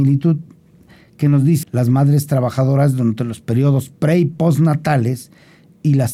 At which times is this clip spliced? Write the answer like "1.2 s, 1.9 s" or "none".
1.6 s